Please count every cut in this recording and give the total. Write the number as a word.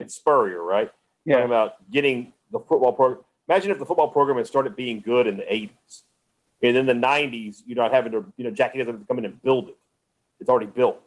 zero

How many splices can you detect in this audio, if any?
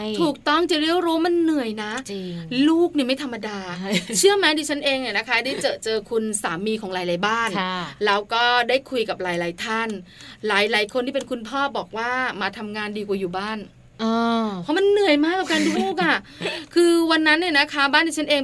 one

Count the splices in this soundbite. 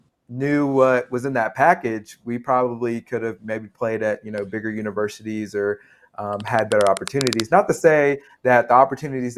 zero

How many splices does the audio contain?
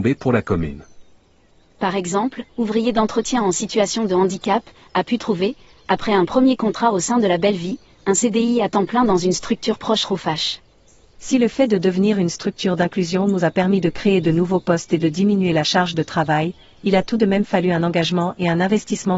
two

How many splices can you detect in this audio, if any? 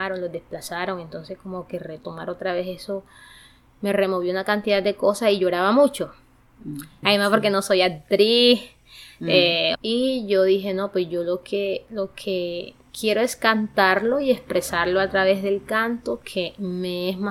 two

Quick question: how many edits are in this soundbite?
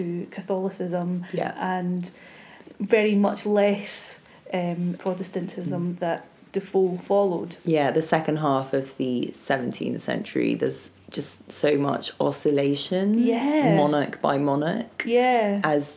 one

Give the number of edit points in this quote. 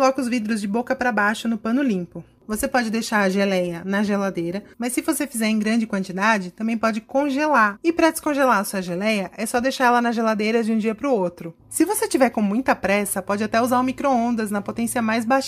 two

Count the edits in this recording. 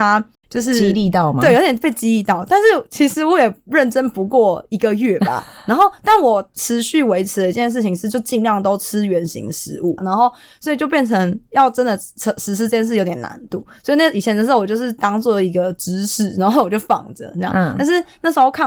one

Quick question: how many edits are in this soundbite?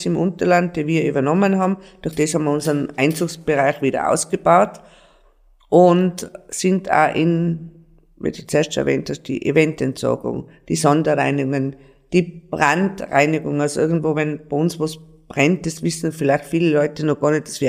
zero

